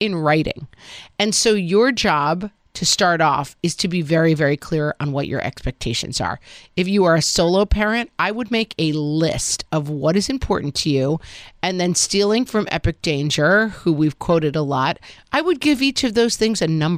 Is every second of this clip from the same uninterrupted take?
yes; 0 cuts

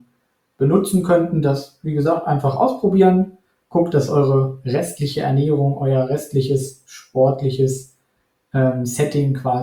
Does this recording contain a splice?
no; 0 cuts

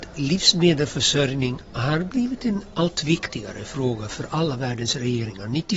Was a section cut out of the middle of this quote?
no; 0 cuts

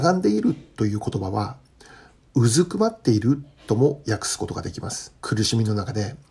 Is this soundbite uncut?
no; 1 cut; at 5.2 s

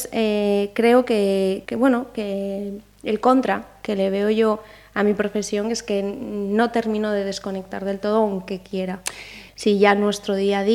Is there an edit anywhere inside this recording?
yes; 2 cuts; at 1.7 s, 9.5 s

